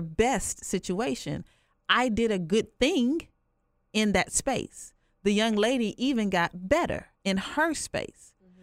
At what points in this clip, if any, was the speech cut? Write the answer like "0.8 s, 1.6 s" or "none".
7.2 s